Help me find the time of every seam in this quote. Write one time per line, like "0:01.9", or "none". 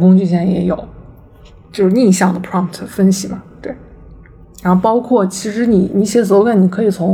none